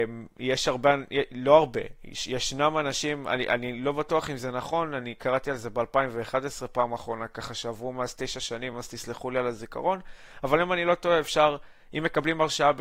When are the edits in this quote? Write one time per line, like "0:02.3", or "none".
none